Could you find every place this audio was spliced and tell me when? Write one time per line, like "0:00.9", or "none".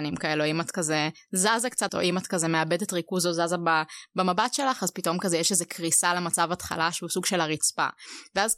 0:01.9